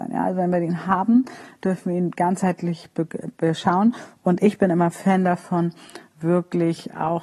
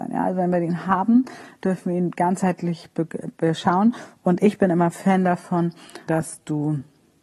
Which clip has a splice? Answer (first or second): second